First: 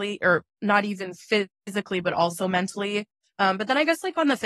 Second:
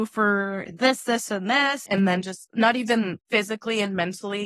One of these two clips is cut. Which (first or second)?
second